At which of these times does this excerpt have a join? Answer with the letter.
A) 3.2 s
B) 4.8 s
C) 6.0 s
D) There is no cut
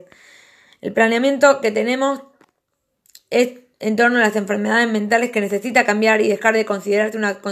D